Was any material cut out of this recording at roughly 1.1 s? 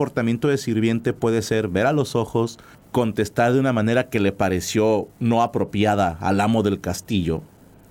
no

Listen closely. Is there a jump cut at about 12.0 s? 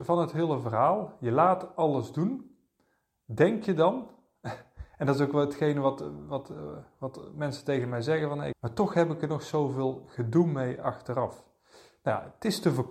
no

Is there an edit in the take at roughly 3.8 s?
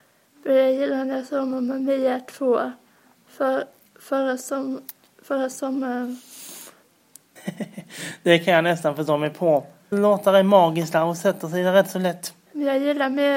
no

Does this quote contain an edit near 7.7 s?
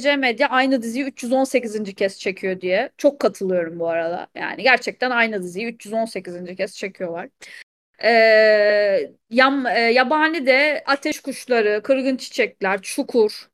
no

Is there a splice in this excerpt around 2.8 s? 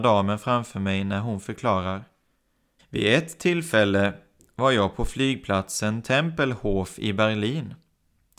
yes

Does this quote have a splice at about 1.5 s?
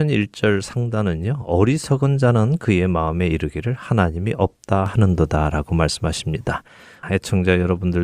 no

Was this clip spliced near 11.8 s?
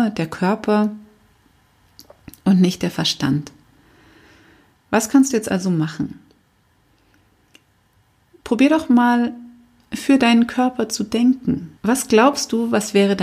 yes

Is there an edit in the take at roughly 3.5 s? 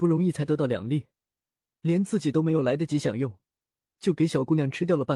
no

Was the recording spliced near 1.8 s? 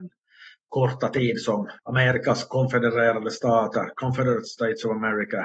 yes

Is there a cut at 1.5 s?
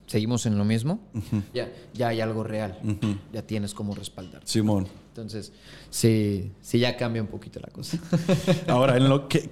yes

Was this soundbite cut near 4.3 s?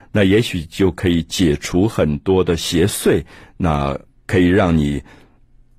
no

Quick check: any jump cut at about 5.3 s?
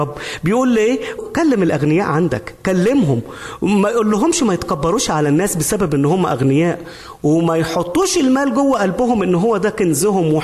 no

